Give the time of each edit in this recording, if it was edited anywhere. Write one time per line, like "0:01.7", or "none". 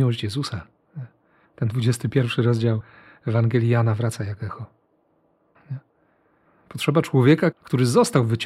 0:05.5
0:07.5